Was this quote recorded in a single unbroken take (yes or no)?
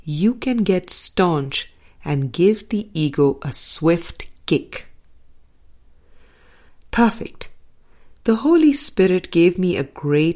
no